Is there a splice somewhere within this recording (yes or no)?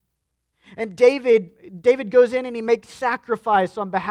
no